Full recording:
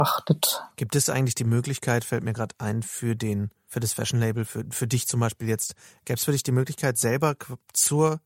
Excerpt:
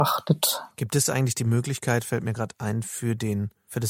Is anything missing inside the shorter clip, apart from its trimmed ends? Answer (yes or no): no